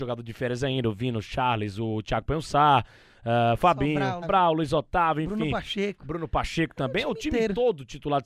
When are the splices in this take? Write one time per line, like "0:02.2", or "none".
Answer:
0:04.2